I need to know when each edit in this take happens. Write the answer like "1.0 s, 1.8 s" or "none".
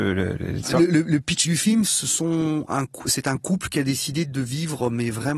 1.8 s